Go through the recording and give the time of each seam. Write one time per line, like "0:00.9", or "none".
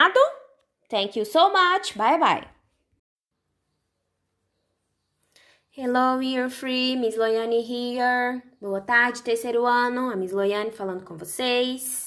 none

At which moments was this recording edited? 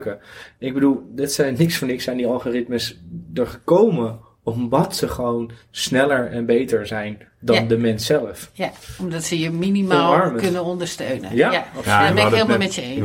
none

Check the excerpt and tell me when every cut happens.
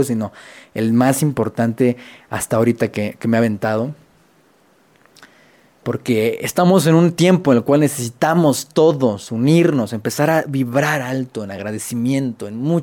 none

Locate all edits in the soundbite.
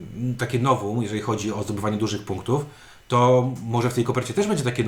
none

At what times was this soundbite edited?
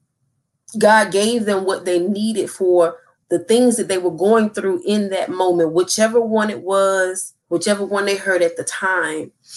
0:07.4

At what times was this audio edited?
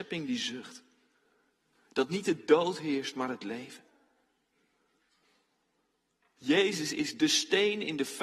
none

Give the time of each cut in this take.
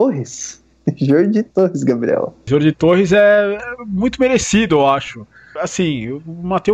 0:02.5
0:05.6

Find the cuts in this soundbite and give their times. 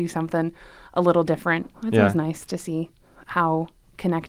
0:01.7

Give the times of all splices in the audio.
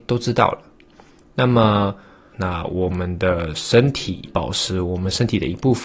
0:02.3
0:04.3

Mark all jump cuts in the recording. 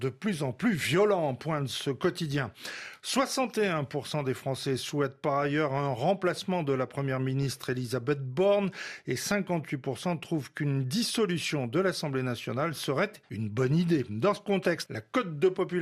0:14.9

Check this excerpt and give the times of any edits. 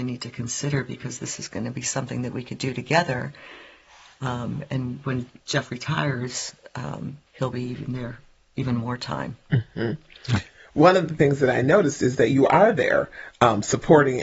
0:07.3

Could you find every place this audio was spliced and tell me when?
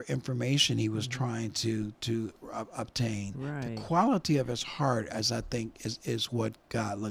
none

